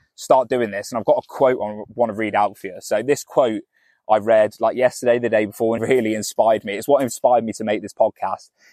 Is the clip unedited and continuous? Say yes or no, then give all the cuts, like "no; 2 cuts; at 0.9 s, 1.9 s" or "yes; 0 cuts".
no; 1 cut; at 5.8 s